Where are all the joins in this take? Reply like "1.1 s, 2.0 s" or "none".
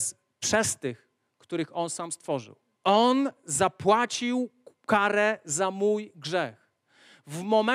2.7 s